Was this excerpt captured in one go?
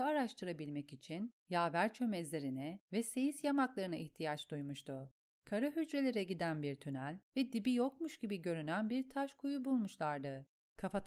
yes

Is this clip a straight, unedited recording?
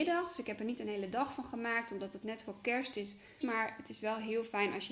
no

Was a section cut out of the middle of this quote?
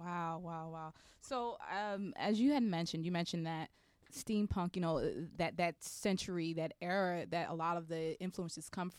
no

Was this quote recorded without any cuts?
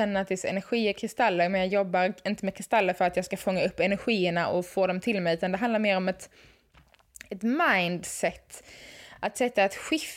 yes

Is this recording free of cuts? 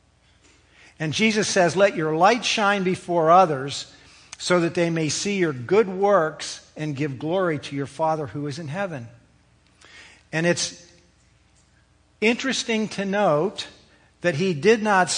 yes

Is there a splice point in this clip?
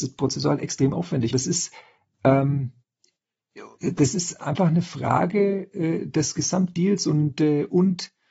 yes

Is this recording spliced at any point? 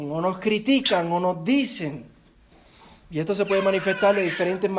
no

